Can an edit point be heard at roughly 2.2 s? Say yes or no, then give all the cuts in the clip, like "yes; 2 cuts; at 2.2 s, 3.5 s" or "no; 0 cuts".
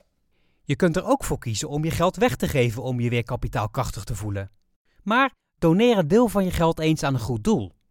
no; 1 cut; at 4.9 s